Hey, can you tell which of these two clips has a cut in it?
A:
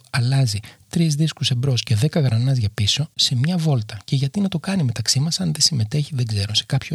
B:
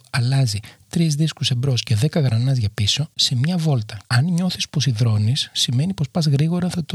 B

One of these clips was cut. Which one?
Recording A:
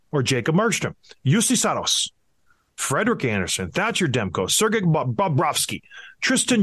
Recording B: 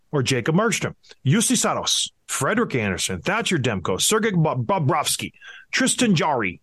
B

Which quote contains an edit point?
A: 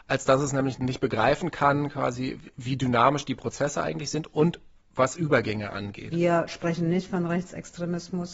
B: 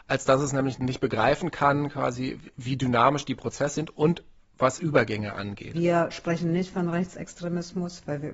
B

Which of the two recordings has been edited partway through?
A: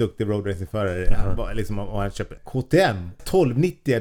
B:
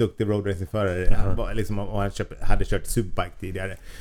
A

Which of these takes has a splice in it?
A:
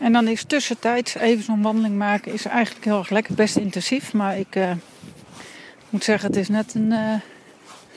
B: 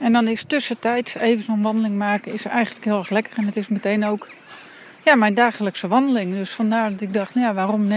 A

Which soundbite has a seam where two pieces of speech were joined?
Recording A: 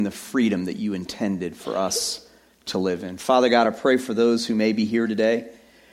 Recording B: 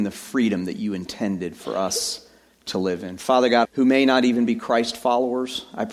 B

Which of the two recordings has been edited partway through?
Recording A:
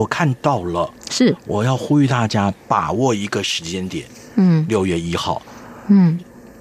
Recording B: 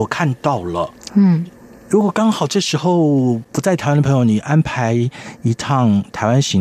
B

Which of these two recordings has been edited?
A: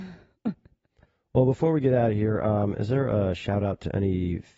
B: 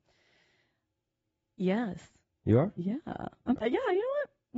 B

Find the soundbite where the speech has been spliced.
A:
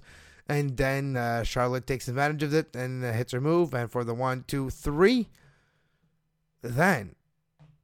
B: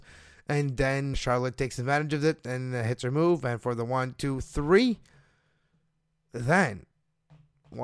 B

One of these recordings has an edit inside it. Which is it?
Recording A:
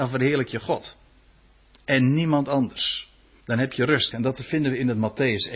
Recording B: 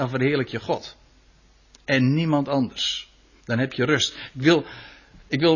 A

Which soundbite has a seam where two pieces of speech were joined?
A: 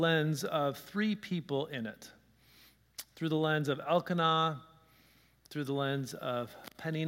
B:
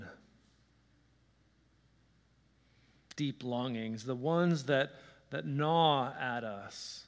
B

